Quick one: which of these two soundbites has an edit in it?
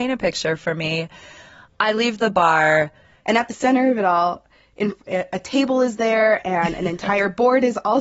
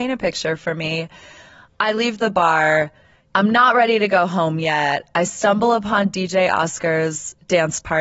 first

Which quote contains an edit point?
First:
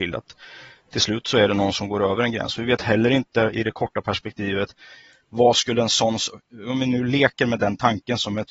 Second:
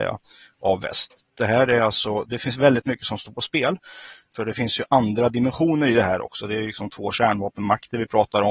second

